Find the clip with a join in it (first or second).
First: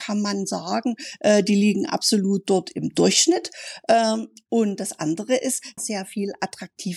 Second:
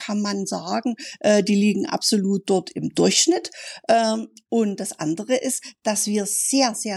first